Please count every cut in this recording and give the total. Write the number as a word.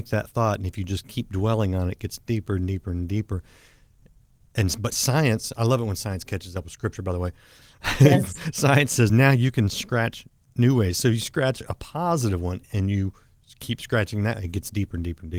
zero